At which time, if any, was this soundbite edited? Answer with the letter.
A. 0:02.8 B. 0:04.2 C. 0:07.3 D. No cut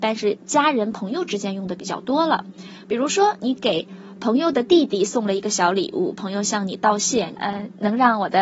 C